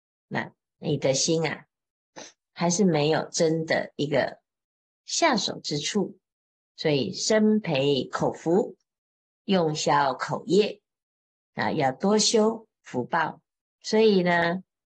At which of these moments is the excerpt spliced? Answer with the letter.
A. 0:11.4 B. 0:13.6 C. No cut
B